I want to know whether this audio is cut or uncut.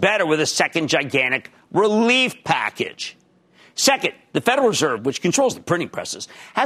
uncut